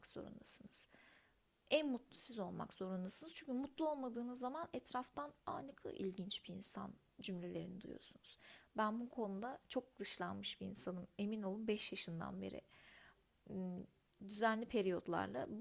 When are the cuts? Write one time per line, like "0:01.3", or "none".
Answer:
none